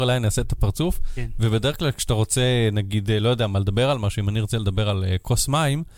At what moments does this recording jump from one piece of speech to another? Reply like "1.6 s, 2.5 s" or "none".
none